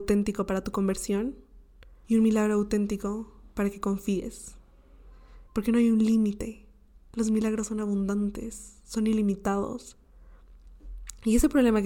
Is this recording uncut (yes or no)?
no